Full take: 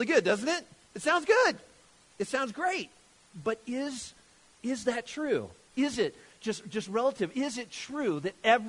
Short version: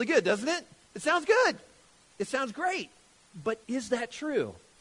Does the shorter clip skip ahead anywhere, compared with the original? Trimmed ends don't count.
yes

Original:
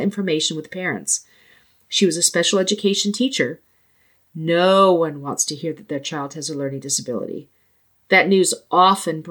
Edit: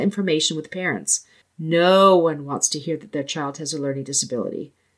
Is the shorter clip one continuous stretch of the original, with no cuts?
no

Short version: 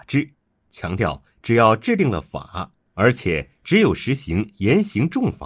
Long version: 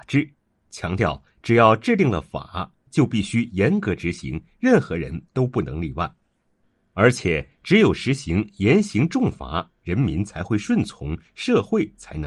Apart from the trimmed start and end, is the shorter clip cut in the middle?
yes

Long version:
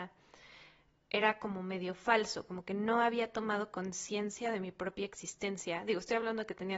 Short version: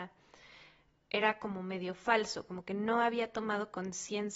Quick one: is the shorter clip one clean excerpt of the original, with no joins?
yes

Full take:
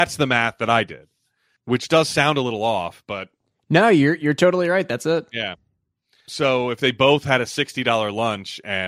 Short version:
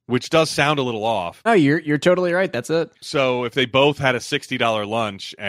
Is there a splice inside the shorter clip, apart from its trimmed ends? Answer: yes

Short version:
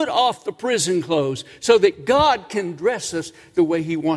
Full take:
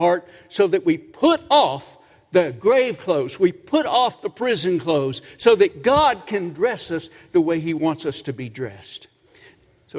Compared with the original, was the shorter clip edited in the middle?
no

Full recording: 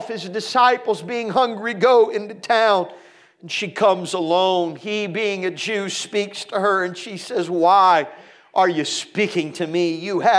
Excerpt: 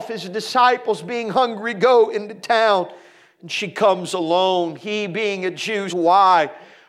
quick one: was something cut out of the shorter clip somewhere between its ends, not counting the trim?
yes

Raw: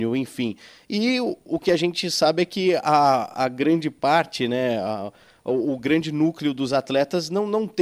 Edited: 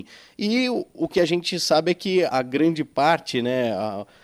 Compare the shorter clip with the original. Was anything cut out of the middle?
yes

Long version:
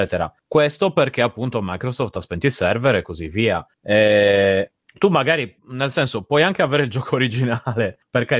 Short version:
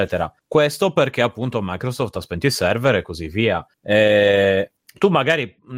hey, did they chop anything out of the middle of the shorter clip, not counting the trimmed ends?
no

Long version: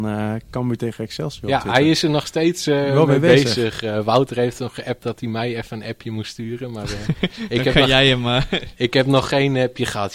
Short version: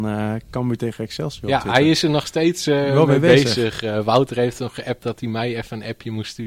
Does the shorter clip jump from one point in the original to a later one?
no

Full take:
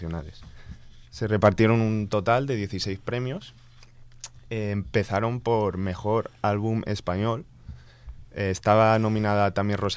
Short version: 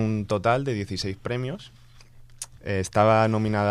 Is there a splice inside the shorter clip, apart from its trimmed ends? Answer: yes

